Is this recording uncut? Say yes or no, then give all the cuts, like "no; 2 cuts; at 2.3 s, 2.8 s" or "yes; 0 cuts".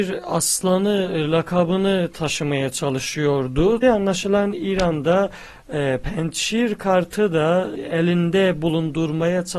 no; 1 cut; at 3.8 s